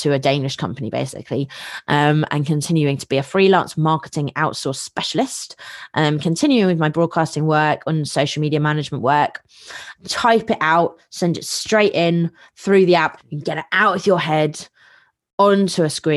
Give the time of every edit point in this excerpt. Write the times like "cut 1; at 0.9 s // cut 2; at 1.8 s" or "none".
cut 1; at 9.9 s // cut 2; at 13.2 s